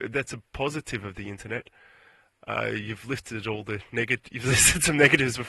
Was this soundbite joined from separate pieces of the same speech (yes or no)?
no